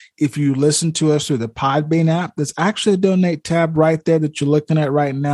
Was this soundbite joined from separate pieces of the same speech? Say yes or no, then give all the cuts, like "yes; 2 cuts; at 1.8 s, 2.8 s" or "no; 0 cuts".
no; 0 cuts